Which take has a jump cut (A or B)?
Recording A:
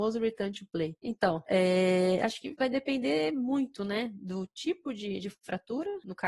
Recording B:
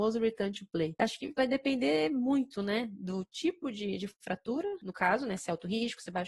B